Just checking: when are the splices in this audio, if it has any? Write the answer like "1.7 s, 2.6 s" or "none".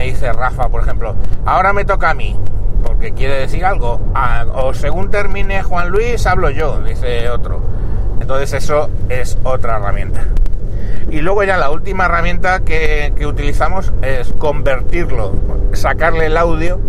8.2 s, 14.3 s

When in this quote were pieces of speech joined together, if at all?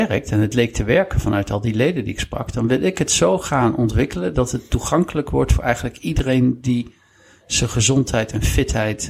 none

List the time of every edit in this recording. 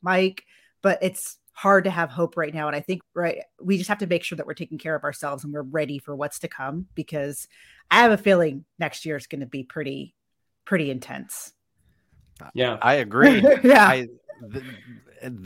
3.0 s

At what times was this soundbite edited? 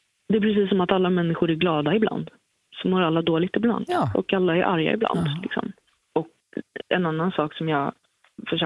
none

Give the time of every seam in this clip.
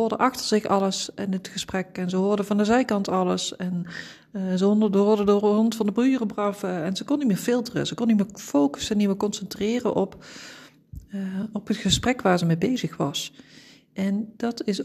none

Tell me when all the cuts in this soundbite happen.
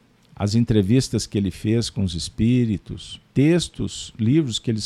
3.3 s

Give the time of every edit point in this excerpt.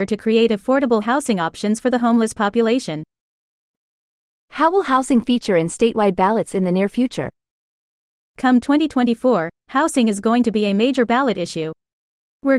none

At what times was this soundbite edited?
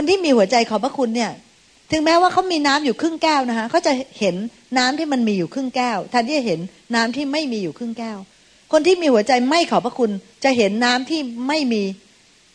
none

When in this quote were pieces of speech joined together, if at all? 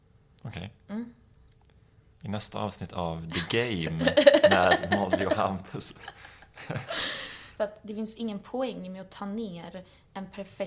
2.1 s, 7.6 s

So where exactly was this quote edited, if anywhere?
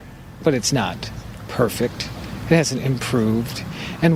none

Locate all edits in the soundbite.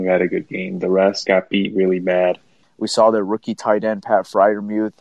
1.3 s, 2.6 s

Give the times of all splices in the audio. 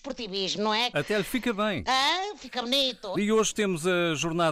0.9 s, 3.1 s

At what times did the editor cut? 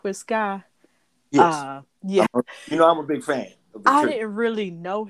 2.3 s

